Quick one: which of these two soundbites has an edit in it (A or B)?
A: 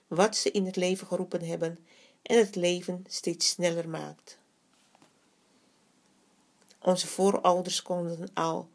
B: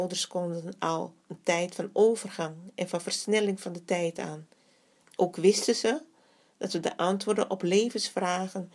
B